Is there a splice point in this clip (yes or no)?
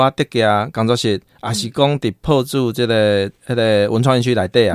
no